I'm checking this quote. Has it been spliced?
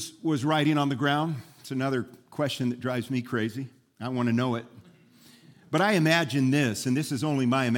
no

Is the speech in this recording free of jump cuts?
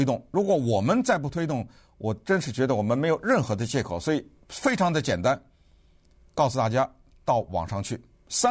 yes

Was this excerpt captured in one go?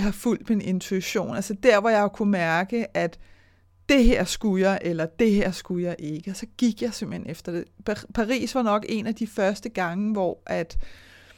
yes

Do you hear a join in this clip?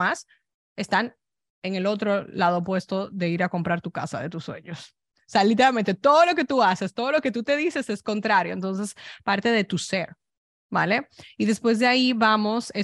no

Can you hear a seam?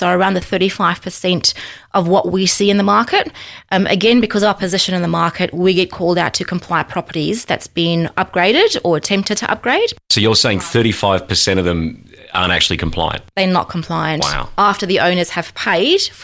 no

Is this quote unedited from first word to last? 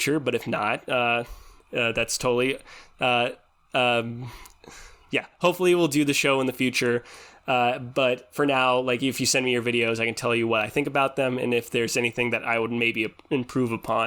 yes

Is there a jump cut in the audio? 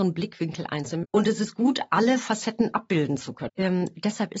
yes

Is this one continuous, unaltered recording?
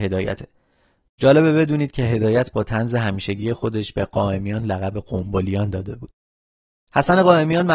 yes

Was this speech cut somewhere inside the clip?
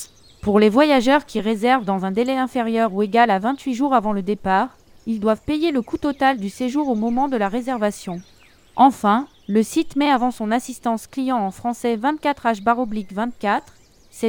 no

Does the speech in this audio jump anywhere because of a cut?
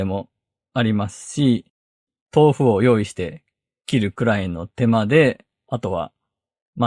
yes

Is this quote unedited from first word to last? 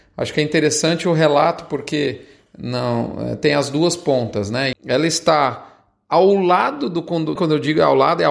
no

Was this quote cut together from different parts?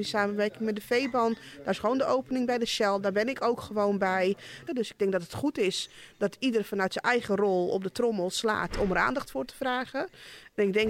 yes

